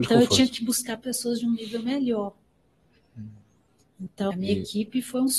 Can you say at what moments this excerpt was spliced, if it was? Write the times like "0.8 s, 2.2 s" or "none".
4.3 s